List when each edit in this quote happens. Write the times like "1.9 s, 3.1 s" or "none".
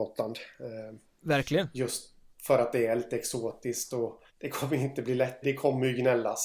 4.3 s, 5.4 s